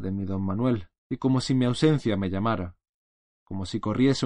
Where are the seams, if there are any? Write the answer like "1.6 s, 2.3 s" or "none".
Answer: 1.0 s